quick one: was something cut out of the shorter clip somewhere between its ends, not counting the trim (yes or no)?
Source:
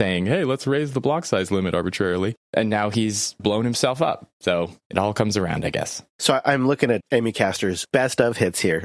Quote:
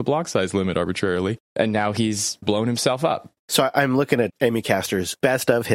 yes